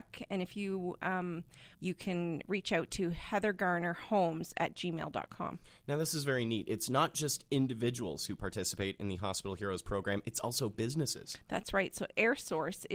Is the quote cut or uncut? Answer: cut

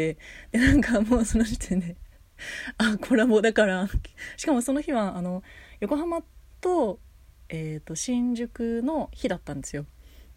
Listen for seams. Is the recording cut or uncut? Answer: uncut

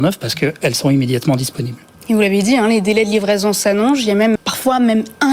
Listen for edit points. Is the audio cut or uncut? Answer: cut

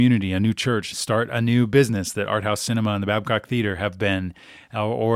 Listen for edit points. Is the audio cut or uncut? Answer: cut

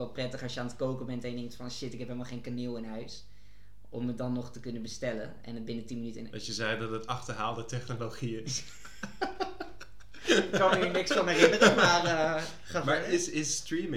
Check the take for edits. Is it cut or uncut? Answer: cut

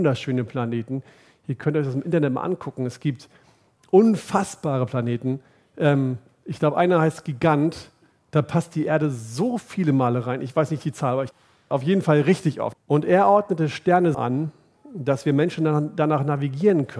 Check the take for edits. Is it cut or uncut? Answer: cut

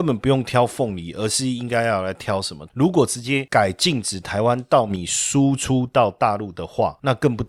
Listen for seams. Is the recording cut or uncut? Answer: cut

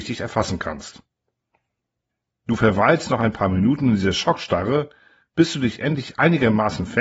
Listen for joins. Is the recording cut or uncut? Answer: uncut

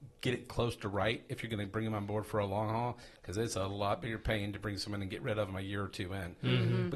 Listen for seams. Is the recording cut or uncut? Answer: uncut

